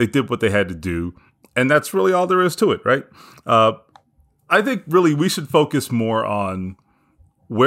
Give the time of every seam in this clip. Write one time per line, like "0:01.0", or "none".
none